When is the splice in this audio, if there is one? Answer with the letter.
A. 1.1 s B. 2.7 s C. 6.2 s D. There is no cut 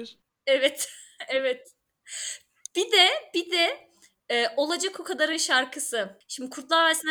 C